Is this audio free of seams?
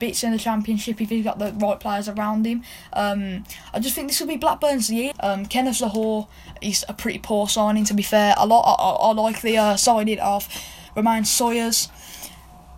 no; 1 cut; at 5.1 s

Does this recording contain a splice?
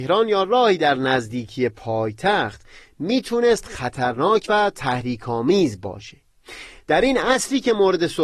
no; 0 cuts

